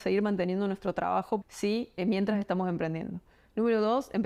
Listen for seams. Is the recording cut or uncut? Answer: cut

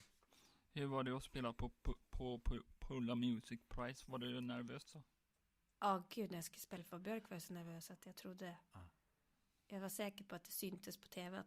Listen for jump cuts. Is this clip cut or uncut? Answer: uncut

